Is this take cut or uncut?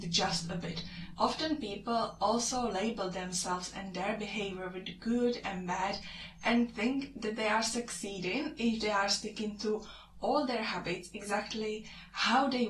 cut